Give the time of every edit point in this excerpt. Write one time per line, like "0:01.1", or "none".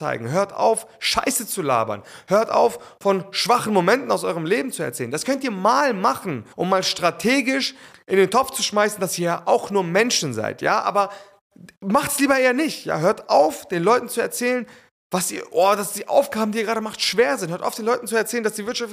0:06.5
0:07.9